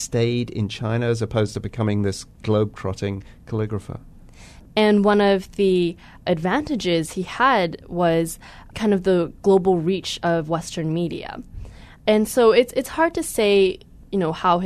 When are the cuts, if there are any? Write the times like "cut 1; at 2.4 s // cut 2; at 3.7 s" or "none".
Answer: cut 1; at 4.6 s